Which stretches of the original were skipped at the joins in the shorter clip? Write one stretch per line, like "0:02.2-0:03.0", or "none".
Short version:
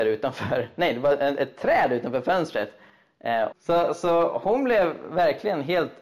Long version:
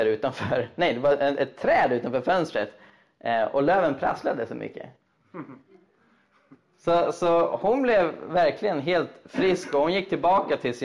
0:03.5-0:06.7